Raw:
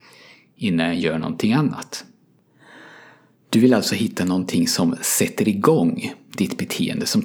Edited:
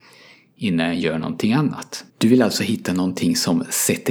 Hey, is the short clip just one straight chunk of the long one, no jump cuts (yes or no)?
no